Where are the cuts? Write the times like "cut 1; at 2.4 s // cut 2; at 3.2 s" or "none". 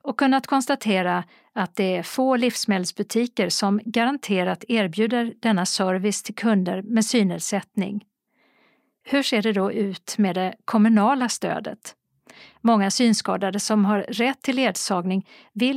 none